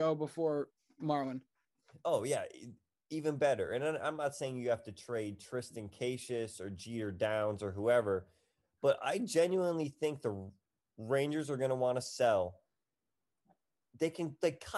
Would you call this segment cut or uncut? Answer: uncut